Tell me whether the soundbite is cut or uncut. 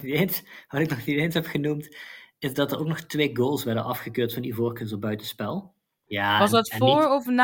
cut